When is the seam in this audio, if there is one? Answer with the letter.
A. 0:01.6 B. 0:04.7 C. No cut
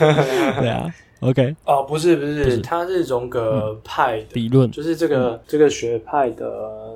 A